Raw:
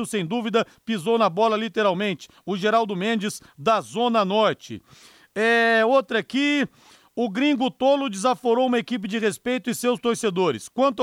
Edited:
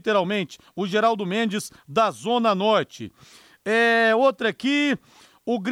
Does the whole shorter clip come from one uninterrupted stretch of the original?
yes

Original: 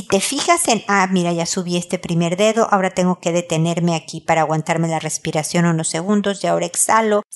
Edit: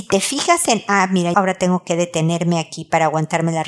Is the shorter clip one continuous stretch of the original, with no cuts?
no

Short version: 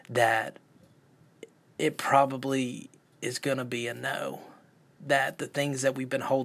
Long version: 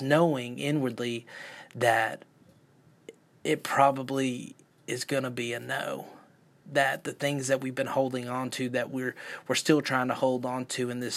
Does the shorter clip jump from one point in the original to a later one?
no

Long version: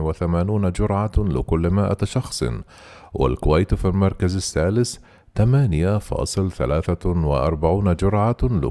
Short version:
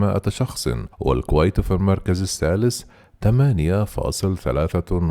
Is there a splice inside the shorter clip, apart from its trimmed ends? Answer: yes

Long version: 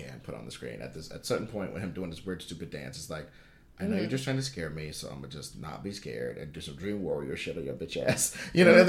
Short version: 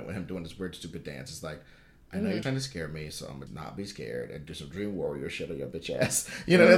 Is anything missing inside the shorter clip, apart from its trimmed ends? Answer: yes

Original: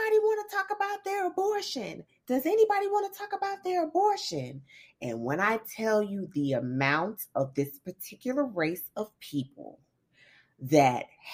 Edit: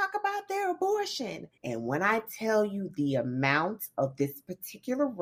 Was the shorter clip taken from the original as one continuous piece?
no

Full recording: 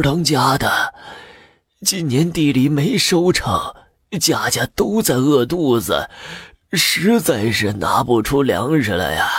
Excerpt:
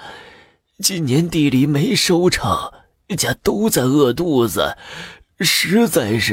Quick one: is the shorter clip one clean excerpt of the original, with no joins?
no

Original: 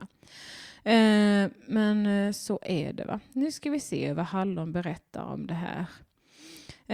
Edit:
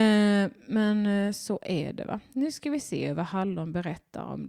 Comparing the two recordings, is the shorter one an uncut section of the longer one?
yes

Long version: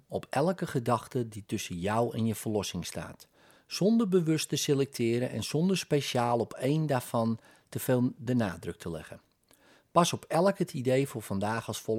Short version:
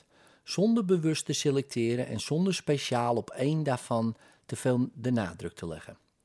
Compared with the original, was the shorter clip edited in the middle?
no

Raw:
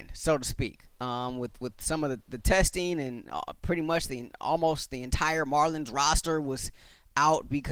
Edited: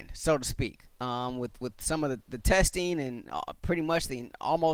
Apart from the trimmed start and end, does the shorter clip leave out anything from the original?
no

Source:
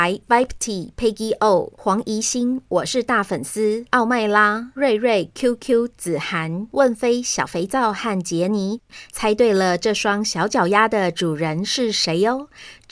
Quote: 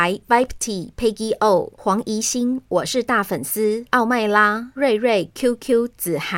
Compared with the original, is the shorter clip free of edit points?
yes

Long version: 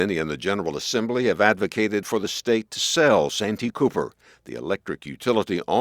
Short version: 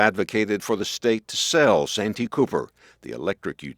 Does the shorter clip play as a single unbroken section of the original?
yes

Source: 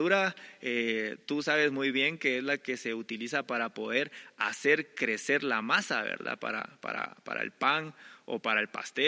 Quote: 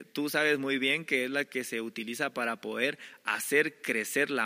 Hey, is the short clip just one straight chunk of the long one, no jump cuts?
yes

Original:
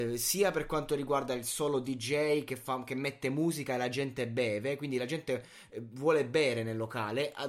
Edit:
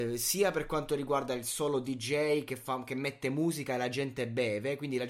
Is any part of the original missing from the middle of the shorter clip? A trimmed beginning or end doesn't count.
no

